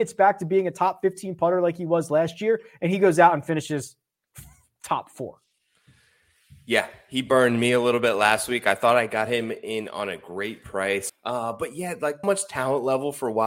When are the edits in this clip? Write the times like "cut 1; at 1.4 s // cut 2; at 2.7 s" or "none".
cut 1; at 11.1 s // cut 2; at 12.2 s